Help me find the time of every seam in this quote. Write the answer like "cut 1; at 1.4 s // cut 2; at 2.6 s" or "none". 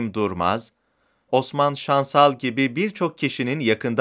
cut 1; at 1.3 s